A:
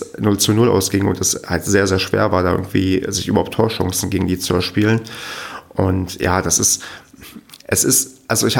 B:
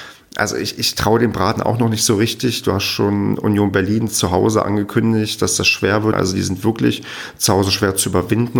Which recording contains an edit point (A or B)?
B